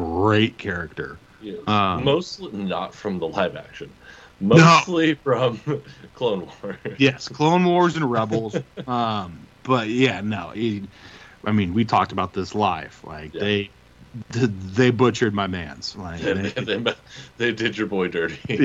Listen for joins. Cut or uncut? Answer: uncut